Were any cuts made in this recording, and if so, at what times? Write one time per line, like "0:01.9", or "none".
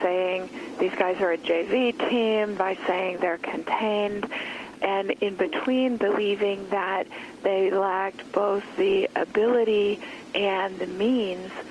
0:02.6
0:04.8